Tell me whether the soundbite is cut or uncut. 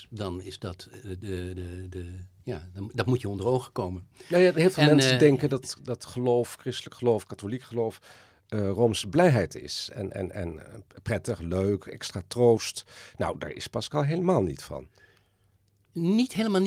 uncut